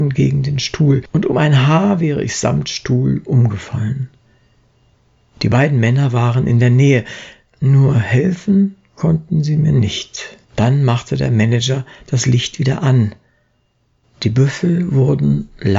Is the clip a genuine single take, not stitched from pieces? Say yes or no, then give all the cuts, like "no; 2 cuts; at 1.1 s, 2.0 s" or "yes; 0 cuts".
no; 3 cuts; at 5.3 s, 10.4 s, 14.0 s